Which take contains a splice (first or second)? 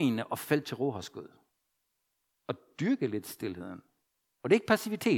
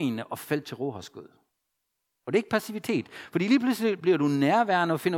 second